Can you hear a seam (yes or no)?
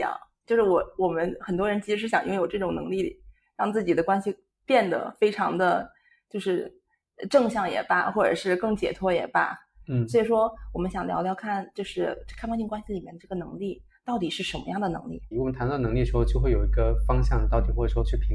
yes